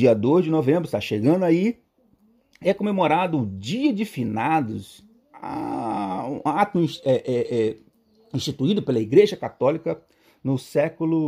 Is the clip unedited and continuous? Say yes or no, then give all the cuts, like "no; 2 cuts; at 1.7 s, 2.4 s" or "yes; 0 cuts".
yes; 0 cuts